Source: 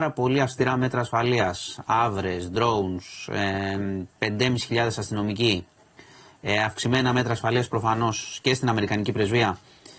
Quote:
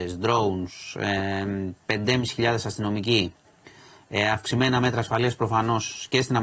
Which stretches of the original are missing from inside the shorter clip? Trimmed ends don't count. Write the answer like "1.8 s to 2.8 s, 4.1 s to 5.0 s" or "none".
none